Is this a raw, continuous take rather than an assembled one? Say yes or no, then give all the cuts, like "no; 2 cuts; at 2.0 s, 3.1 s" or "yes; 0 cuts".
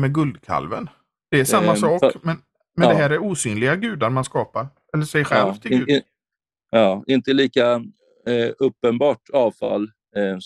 yes; 0 cuts